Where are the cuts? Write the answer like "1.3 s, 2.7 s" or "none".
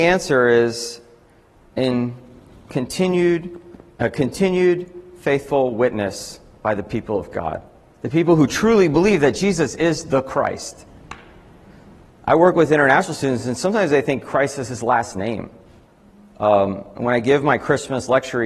none